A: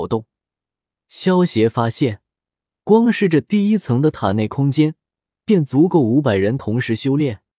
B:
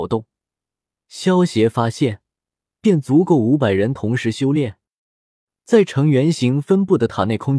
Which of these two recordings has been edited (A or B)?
B